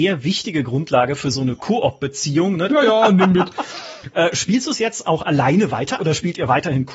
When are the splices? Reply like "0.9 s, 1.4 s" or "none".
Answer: 2.7 s, 4.1 s, 6.0 s

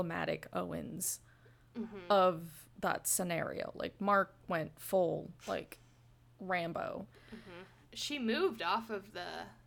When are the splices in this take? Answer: 5.4 s, 7.8 s

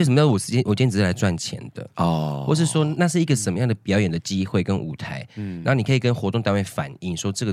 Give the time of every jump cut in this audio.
1.9 s

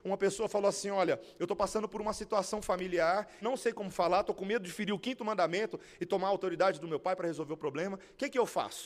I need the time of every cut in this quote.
3.4 s

